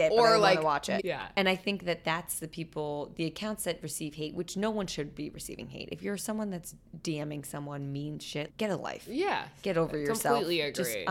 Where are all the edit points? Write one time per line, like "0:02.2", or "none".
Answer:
0:01.0
0:08.5